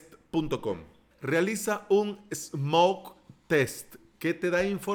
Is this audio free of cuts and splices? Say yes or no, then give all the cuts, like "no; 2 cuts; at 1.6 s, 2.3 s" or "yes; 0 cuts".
yes; 0 cuts